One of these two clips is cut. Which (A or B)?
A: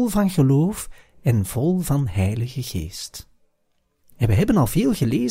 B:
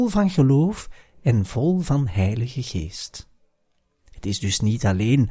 A